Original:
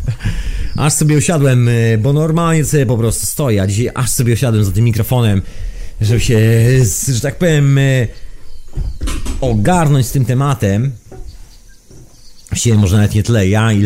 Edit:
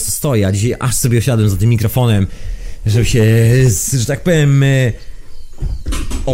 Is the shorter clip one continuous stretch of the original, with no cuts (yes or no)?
yes